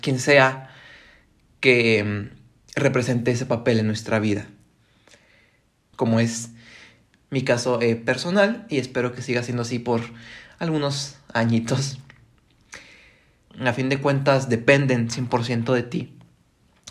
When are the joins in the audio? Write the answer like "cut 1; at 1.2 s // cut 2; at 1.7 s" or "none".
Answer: cut 1; at 5.9 s // cut 2; at 13.5 s